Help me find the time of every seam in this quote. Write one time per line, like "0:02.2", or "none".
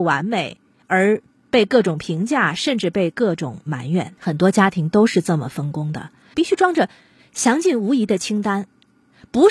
0:04.2
0:06.3